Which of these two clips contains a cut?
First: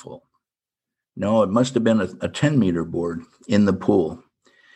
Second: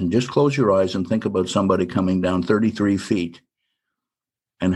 first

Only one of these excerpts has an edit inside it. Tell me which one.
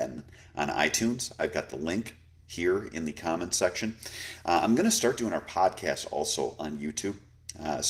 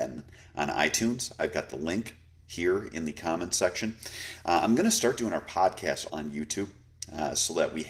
second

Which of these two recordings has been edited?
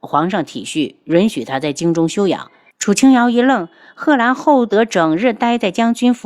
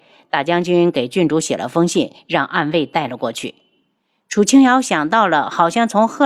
first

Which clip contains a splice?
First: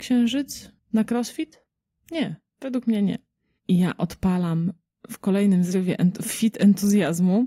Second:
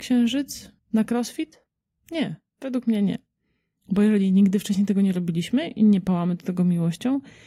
first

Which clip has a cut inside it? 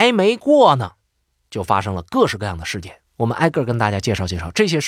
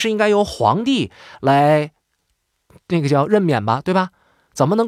first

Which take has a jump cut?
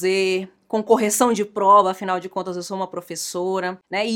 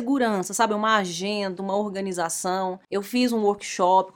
second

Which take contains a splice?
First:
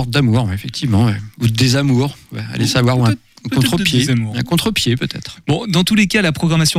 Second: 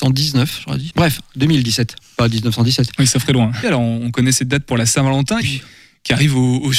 second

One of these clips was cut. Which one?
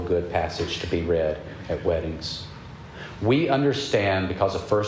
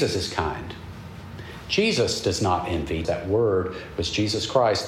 second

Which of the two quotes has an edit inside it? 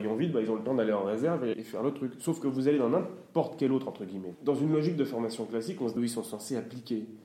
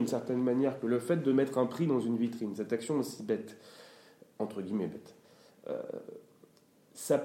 first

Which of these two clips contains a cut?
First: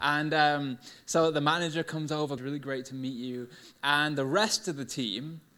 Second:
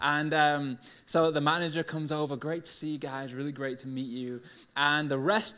first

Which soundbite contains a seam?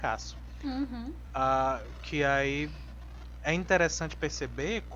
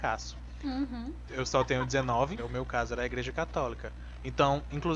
second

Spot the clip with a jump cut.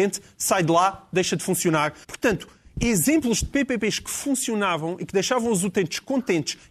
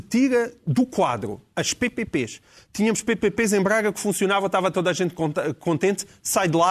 first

